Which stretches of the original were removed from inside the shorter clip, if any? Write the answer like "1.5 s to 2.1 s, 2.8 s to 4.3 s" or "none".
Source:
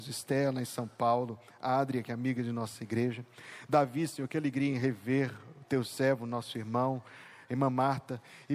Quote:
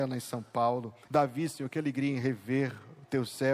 1.5 s to 3.7 s